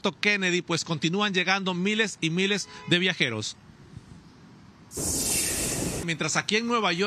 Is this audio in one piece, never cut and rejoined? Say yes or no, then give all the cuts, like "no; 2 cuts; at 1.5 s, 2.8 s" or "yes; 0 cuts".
no; 1 cut; at 6.0 s